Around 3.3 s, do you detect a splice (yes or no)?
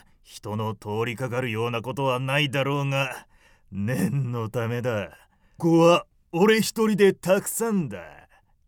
no